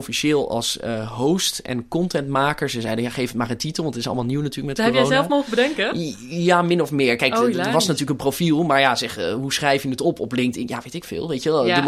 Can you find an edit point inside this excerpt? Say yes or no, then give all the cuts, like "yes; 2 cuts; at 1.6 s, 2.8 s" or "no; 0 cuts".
no; 0 cuts